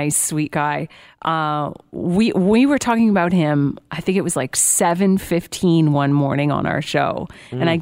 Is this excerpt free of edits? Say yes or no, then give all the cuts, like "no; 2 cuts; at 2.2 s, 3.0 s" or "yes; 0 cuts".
yes; 0 cuts